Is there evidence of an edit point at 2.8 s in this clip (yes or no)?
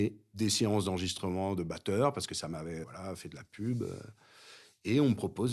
yes